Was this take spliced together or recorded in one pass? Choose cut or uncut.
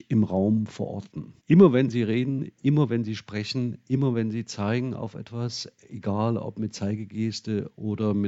cut